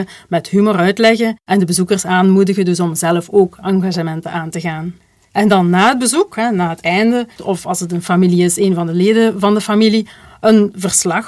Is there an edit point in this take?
yes; 1 cut; at 7.4 s

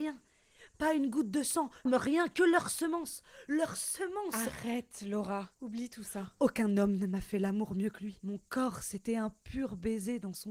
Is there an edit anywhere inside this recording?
yes; 1 cut; at 1.9 s

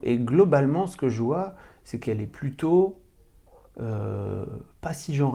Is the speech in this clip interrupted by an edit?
no; 0 cuts

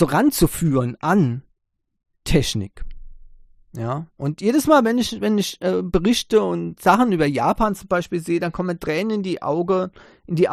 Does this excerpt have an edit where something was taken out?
no; 0 cuts

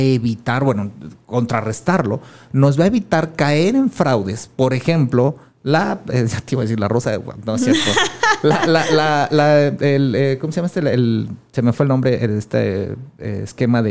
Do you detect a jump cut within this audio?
no; 0 cuts

